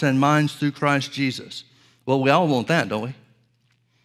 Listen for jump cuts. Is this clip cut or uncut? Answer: uncut